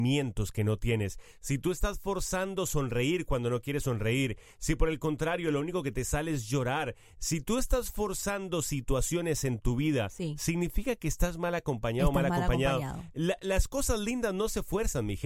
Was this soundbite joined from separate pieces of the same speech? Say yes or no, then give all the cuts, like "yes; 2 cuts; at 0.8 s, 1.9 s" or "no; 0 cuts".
no; 0 cuts